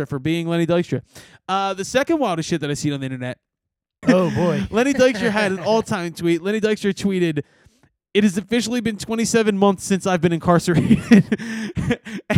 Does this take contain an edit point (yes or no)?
yes